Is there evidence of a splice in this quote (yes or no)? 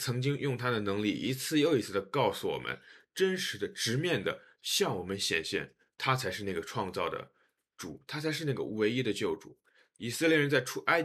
no